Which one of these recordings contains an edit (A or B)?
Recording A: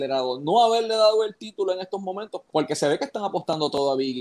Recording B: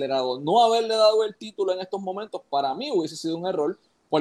A